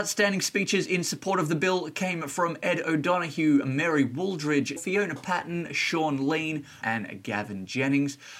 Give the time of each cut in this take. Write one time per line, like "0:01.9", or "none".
0:04.8
0:06.8